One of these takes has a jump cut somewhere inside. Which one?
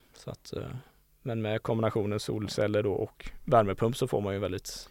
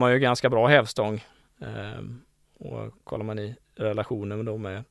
second; 1 cut; at 3.0 s

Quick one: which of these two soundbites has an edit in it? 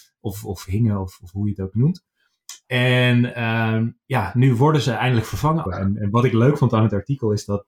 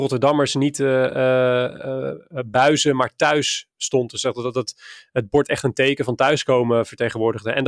first; 2 cuts; at 4.0 s, 5.6 s

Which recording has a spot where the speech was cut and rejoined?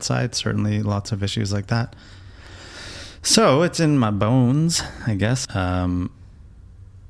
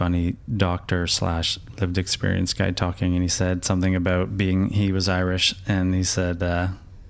first; 1 cut; at 5.4 s

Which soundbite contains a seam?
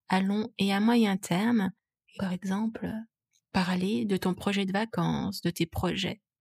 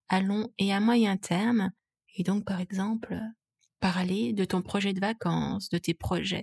first; 1 cut; at 2.2 s

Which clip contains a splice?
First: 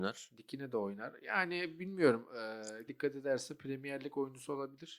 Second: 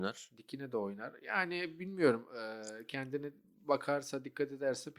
first; 1 cut; at 2.9 s

